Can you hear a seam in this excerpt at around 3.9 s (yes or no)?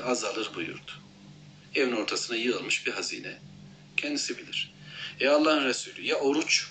yes